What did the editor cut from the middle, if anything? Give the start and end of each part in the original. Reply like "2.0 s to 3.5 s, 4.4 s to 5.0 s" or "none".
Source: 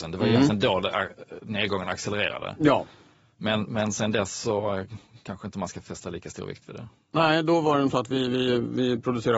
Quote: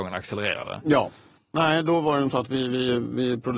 3.1 s to 7.0 s